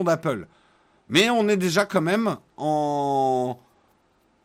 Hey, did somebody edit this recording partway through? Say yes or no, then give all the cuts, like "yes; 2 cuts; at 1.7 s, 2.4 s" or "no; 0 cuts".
no; 0 cuts